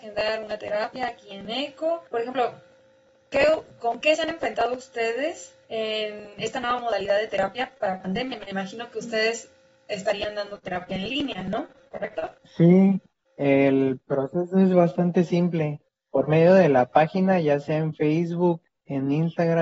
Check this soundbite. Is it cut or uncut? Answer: cut